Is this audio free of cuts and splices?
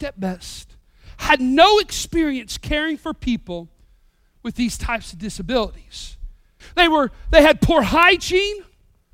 no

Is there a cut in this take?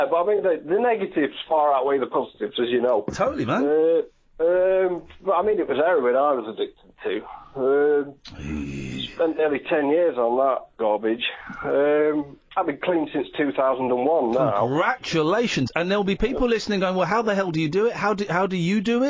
no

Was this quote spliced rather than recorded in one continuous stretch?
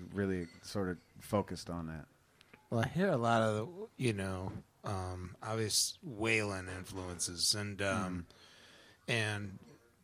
no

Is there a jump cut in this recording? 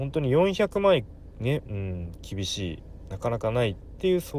yes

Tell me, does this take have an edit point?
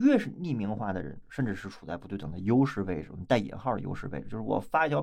yes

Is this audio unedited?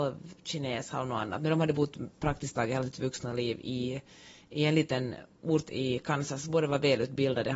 yes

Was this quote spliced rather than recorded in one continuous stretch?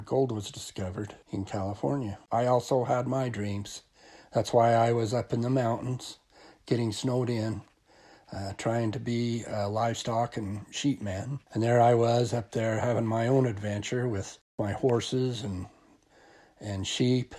yes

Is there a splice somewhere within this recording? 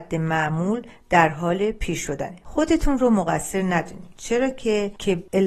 no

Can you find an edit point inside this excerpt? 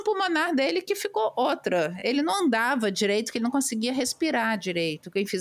no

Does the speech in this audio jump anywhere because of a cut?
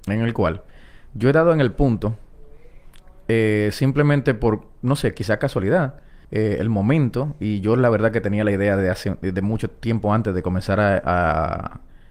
yes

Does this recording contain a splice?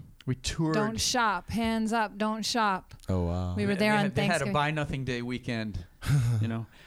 no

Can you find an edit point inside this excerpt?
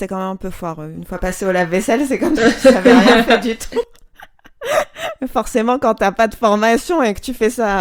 no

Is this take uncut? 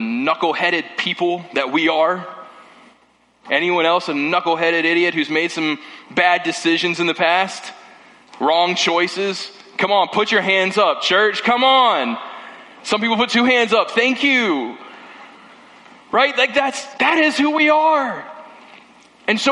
yes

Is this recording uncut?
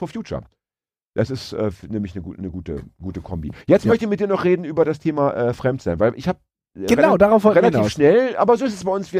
yes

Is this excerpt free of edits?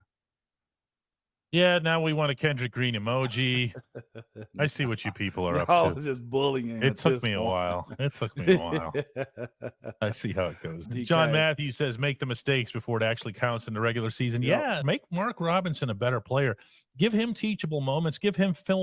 no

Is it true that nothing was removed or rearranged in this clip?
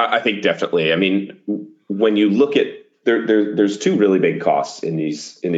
yes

